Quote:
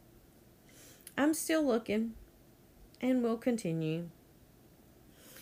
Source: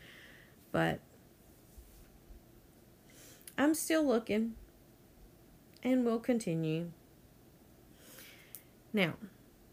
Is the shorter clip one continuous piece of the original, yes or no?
no